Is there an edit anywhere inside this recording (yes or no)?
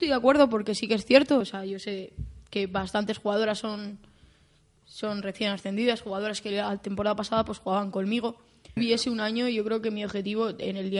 yes